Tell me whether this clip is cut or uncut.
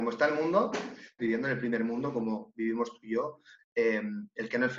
cut